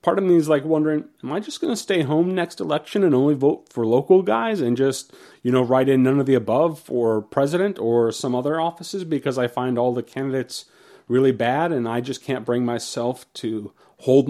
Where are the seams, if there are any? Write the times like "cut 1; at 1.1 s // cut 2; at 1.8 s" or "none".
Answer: none